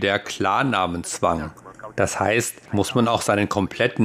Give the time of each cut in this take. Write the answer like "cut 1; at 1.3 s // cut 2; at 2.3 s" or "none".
cut 1; at 2.7 s

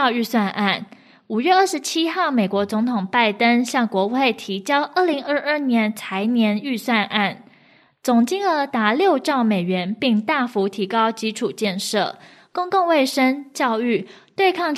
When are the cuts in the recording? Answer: none

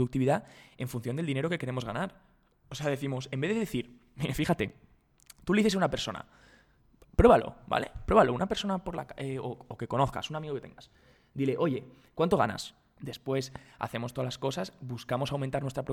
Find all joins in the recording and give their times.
cut 1; at 13.0 s

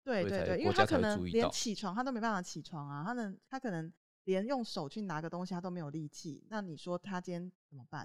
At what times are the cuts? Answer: none

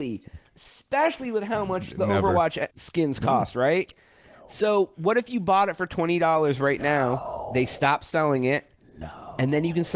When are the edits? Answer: cut 1; at 2.7 s

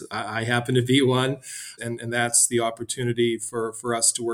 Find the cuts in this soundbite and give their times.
cut 1; at 1.8 s

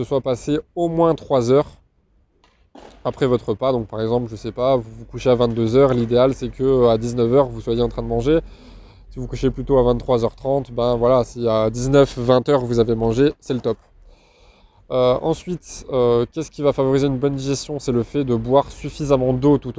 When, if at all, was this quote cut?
none

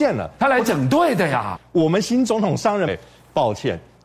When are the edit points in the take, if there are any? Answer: cut 1; at 1.6 s // cut 2; at 2.9 s

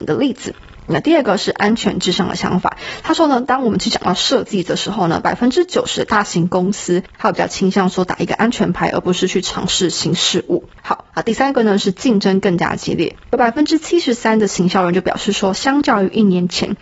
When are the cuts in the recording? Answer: none

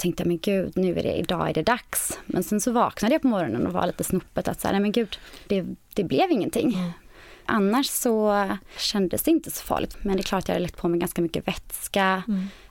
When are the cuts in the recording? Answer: cut 1; at 7.5 s // cut 2; at 9.9 s

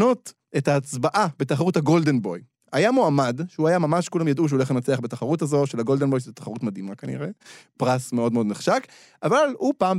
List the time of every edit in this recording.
none

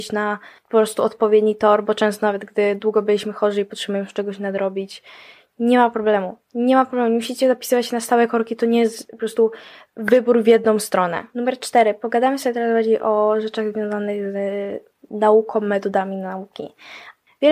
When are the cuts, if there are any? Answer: none

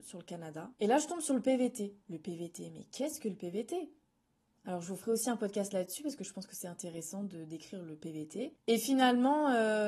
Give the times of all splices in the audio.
cut 1; at 2.0 s // cut 2; at 8.6 s

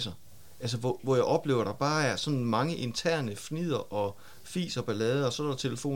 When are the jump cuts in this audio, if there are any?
cut 1; at 1.0 s

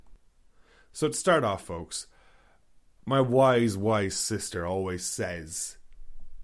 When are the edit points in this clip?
none

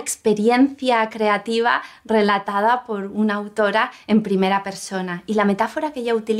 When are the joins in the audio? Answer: none

